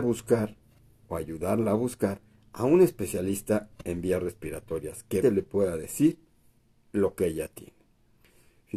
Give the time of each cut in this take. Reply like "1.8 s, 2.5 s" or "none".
5.2 s